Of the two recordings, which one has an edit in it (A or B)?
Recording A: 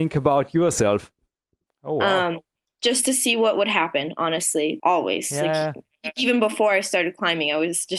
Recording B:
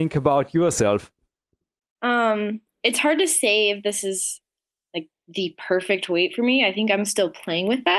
A